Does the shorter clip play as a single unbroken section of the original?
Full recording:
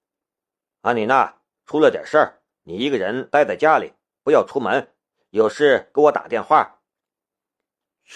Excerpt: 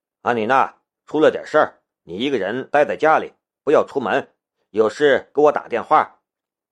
yes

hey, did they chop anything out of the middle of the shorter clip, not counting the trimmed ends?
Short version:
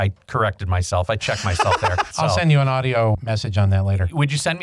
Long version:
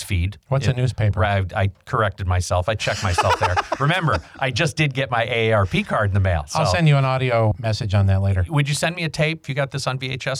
yes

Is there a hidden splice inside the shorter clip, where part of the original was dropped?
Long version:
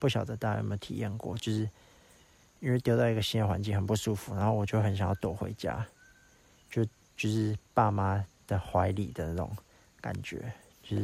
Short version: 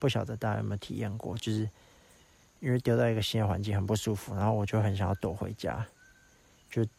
no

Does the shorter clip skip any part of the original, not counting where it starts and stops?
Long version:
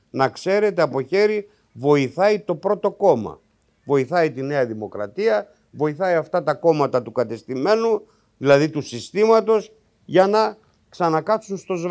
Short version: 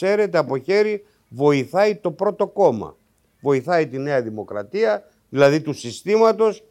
yes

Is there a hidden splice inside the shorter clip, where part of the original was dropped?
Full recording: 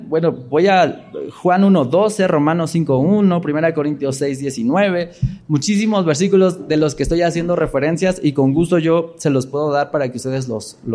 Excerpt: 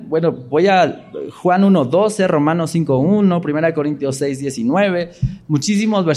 no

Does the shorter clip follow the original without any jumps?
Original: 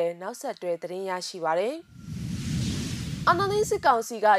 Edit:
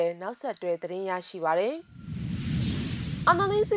yes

